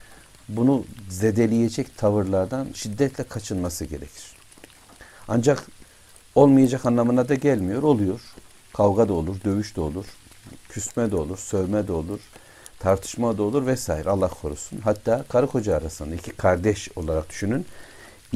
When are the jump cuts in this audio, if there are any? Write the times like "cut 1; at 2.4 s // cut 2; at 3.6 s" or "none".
none